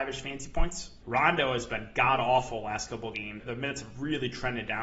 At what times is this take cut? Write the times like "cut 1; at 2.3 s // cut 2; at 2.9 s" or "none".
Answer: cut 1; at 1.0 s // cut 2; at 3.4 s